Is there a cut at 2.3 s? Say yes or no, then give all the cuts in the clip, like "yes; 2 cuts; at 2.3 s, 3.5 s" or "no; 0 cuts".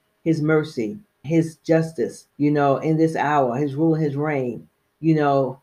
yes; 2 cuts; at 1.2 s, 2.3 s